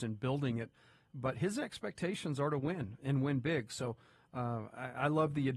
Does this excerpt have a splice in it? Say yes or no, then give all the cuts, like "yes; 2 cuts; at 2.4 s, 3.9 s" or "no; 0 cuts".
no; 0 cuts